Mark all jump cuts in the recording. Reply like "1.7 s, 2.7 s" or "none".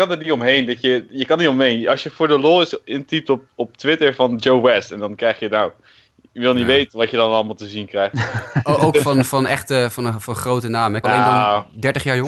11.0 s